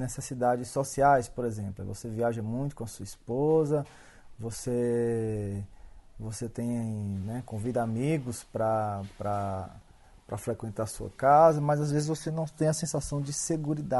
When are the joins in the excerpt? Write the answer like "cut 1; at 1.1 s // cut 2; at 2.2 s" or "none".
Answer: none